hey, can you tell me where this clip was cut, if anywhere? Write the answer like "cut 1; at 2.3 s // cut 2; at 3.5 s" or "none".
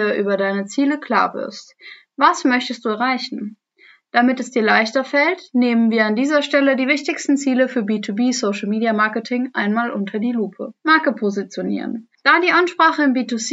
cut 1; at 10.8 s // cut 2; at 12.1 s